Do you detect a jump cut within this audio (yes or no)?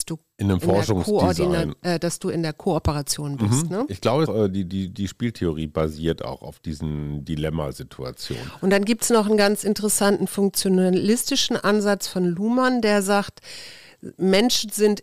yes